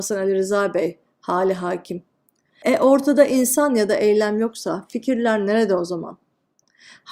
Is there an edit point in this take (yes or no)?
yes